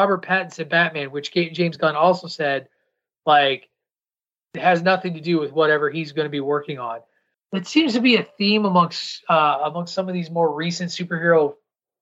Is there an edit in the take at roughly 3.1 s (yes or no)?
no